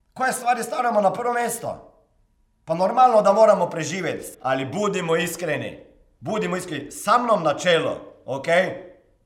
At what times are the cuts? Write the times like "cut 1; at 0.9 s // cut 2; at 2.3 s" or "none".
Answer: cut 1; at 4.3 s